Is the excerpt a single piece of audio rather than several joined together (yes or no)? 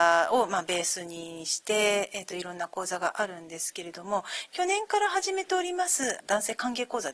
yes